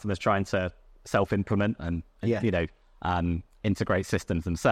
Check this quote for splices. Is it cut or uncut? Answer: uncut